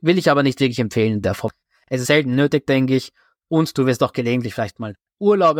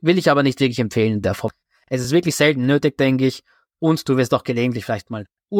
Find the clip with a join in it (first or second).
first